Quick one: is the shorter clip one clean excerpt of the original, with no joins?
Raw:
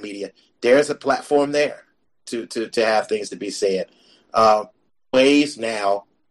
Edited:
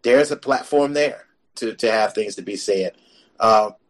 no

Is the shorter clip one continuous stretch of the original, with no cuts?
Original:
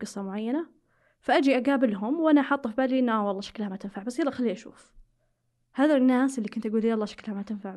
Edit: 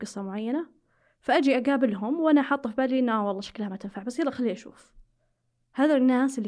yes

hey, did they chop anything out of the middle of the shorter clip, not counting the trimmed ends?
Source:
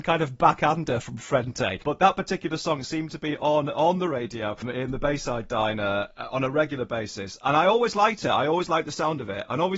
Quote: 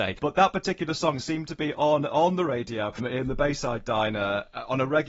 no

